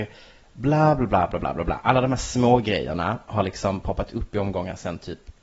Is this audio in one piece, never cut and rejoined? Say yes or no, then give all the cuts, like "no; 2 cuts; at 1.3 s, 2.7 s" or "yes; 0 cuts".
yes; 0 cuts